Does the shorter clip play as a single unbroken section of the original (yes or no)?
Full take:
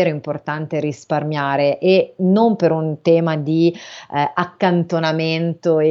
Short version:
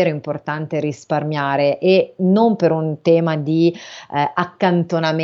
yes